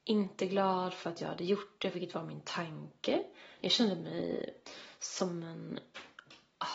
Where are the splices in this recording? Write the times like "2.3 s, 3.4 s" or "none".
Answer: 1.9 s, 3.6 s